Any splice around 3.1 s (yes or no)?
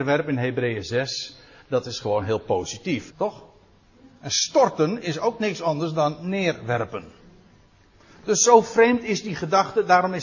yes